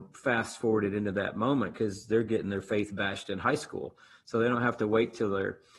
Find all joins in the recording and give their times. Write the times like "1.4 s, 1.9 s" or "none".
none